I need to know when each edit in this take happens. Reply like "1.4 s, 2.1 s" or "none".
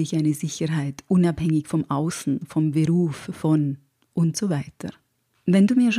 none